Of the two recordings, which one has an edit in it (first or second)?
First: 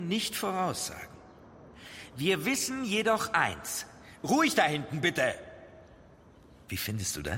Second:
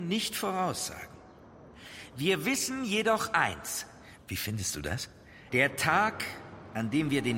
second